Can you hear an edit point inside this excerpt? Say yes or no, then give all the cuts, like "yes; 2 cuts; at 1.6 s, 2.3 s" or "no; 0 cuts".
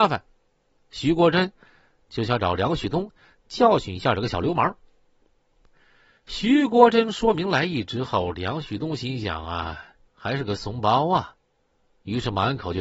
yes; 1 cut; at 10.1 s